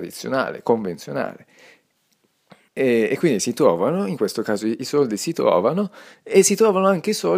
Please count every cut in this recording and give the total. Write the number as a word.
zero